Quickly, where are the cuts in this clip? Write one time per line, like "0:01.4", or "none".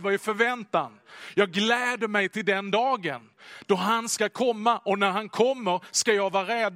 none